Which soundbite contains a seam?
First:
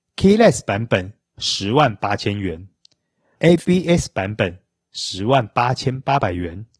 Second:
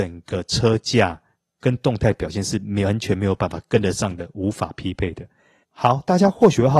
second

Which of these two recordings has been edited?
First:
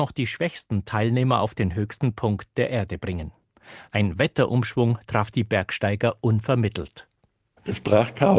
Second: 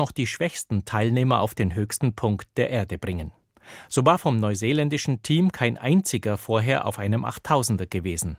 first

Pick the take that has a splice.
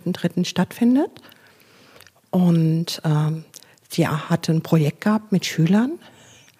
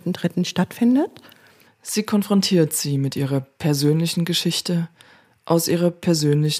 second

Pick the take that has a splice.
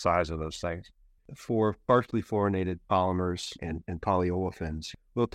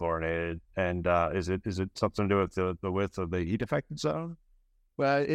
first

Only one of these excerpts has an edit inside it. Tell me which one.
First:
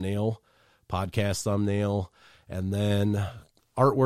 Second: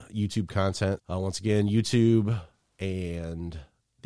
second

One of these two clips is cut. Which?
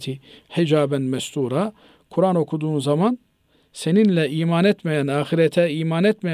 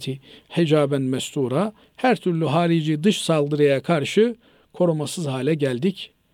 second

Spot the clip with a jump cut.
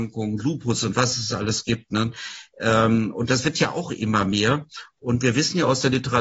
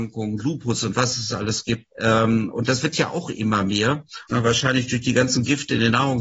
second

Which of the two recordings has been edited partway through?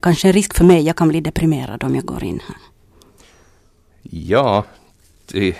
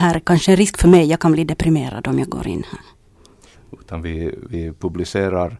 second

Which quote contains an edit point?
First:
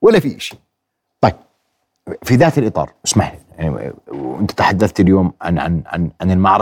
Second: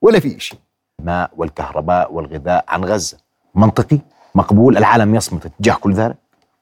second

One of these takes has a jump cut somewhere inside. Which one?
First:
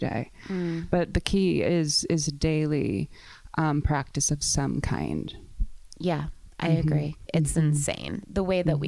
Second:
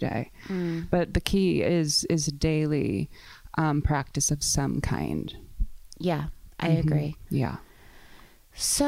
first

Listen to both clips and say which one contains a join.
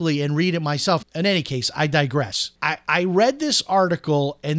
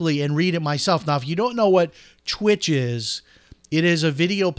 first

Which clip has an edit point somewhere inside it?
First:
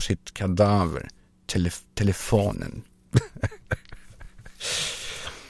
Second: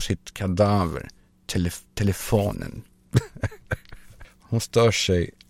second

